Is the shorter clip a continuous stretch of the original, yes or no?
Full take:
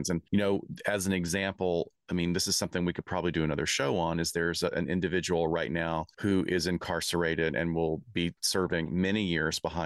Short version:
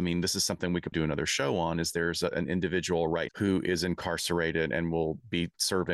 no